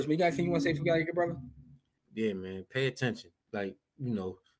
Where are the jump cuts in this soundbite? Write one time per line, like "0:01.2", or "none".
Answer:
none

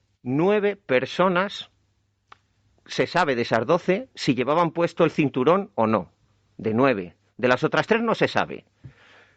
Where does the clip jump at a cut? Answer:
none

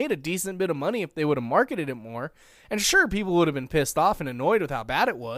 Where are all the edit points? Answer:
none

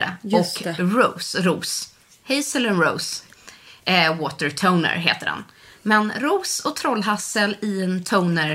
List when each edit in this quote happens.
none

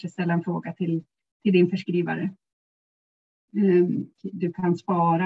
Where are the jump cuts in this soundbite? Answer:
0:04.1

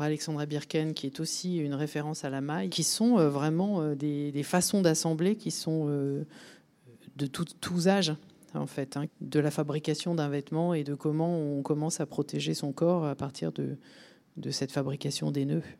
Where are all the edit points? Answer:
0:02.7
0:09.1

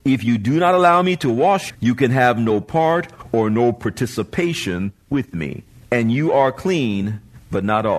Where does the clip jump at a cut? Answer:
0:01.7
0:05.8

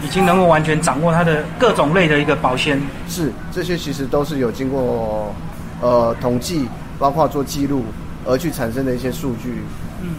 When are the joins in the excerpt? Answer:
none

